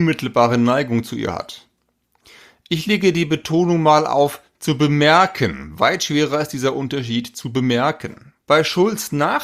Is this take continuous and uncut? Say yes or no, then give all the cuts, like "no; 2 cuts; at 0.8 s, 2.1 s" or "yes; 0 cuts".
no; 1 cut; at 8.4 s